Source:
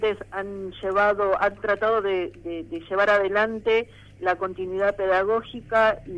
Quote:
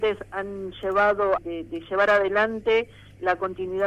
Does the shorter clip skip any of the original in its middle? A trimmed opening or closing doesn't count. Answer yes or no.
yes